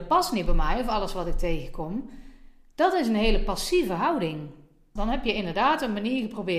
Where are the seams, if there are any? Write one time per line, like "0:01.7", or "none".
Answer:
0:05.0

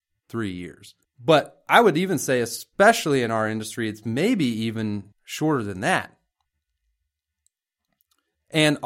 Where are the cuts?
0:01.0
0:05.1

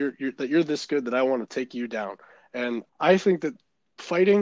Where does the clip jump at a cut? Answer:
0:02.9

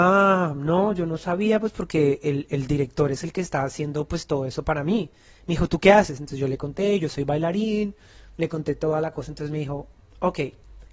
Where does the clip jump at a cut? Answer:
0:02.5

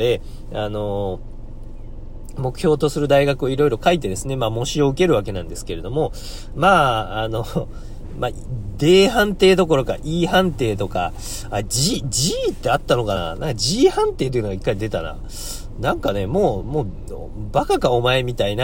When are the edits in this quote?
none

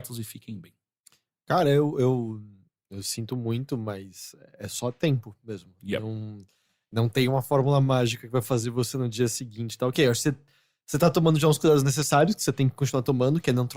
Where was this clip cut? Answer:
none

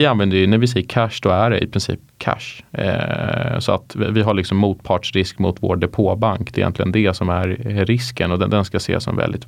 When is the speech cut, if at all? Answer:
none

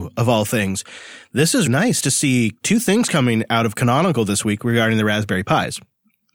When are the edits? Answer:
0:01.7

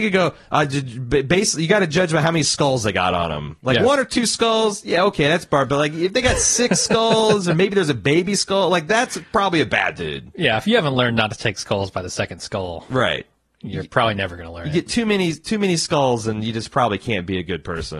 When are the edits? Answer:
none

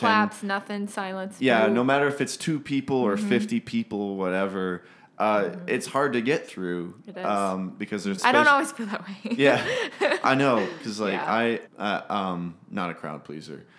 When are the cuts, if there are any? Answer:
0:08.2
0:11.7

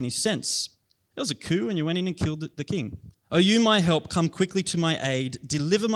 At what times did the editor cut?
0:01.1
0:03.1

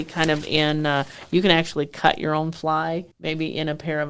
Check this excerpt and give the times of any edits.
0:03.1

